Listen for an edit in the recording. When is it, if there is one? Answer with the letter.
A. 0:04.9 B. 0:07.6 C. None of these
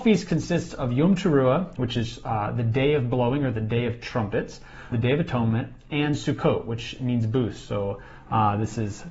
A